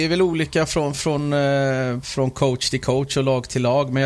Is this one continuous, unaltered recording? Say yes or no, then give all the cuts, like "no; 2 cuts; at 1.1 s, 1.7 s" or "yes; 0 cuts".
yes; 0 cuts